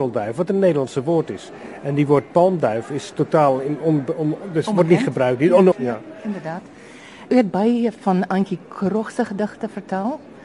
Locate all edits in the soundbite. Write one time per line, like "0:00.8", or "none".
0:05.7